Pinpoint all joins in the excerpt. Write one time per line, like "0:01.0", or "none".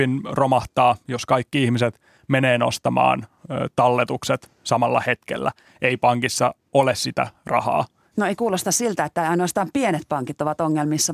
0:08.1

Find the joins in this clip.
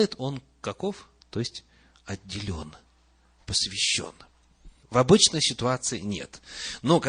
0:01.2
0:04.8

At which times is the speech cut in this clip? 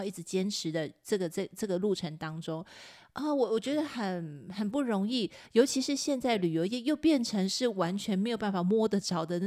none

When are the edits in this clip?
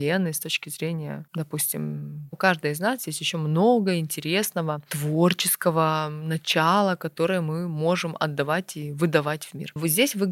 0:02.3

